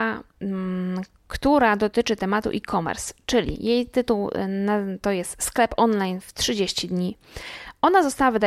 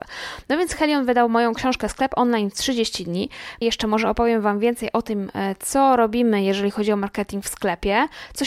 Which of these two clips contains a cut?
second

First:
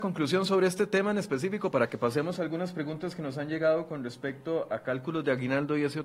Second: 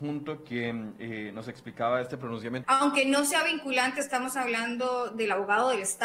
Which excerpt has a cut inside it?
second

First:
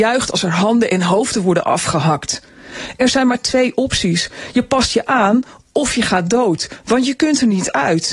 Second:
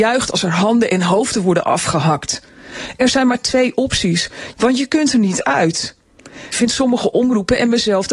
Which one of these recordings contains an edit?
second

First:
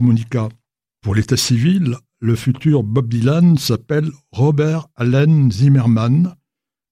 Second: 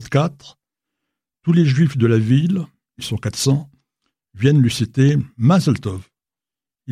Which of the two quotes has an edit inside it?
first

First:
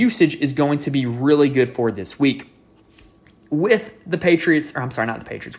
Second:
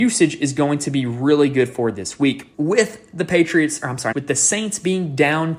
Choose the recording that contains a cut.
second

